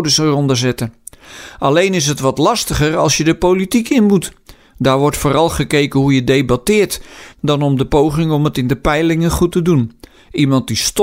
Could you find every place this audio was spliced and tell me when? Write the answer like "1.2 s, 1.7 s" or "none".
7.3 s